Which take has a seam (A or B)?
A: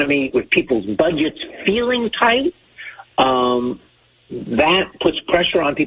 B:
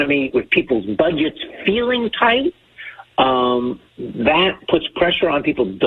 B